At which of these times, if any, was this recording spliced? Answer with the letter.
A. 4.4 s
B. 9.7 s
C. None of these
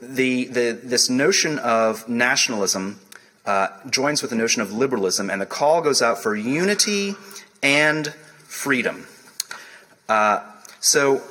C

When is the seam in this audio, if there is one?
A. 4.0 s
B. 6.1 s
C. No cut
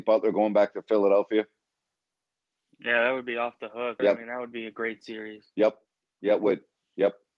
A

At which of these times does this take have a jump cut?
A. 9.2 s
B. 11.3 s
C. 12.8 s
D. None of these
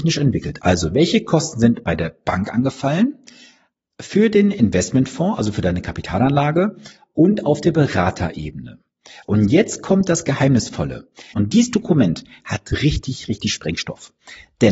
B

